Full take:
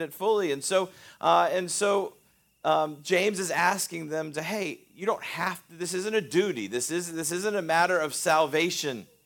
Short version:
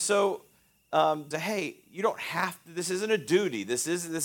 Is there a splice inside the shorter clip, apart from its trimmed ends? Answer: yes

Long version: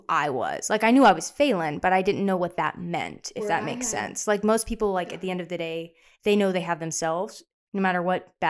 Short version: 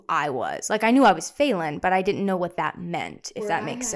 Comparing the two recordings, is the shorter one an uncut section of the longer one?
yes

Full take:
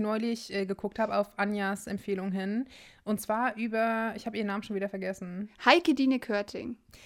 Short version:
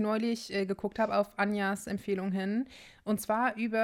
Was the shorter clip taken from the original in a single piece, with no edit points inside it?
yes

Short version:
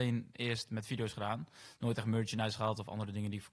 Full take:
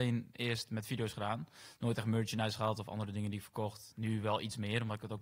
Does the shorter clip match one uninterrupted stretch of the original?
yes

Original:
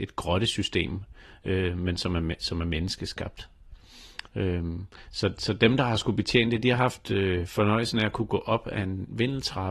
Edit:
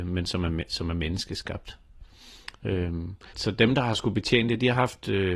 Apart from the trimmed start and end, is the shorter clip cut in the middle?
yes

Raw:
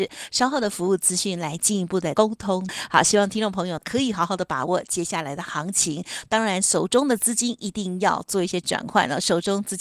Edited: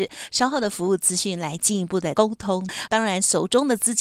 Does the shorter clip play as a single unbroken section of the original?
no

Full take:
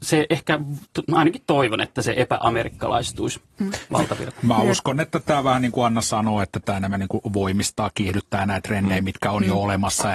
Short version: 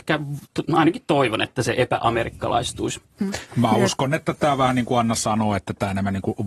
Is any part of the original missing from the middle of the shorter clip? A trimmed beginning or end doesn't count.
yes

